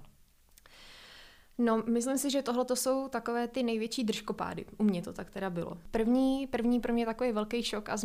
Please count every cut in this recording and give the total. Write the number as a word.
zero